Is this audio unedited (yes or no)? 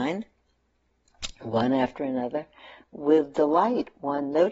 no